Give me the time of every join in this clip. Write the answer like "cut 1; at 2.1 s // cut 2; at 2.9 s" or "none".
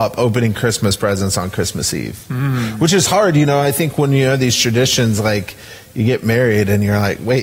none

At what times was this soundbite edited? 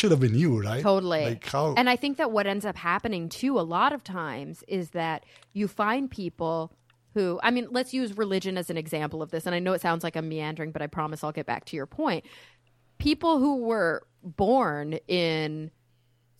cut 1; at 7.7 s

